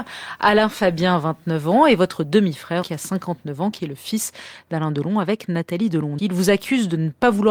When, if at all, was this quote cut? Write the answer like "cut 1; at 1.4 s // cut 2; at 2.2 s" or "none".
cut 1; at 2.8 s // cut 2; at 6.2 s

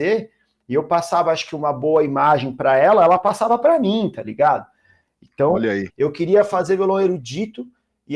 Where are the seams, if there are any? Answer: cut 1; at 5.9 s

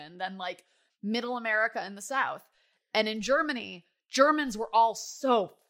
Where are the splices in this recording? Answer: none

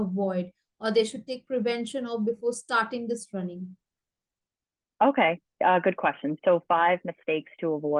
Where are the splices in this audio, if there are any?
none

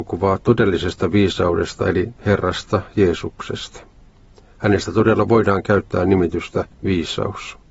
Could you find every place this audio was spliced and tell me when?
none

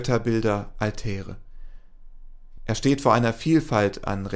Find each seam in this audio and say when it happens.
none

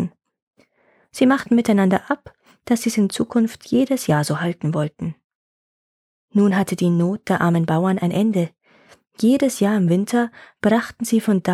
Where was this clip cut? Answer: none

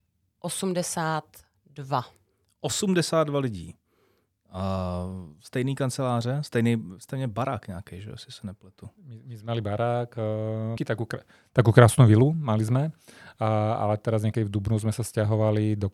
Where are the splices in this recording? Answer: cut 1; at 10.8 s

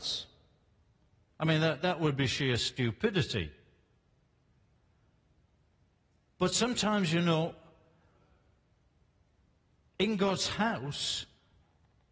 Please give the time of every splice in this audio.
none

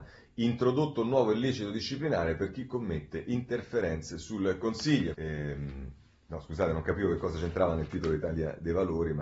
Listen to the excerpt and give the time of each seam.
cut 1; at 5.1 s

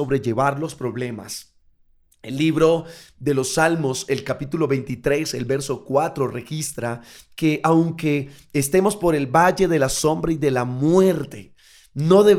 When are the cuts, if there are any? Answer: none

